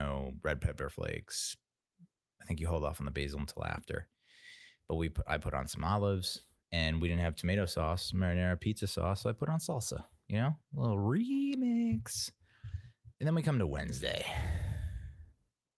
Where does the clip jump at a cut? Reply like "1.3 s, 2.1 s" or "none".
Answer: 13.1 s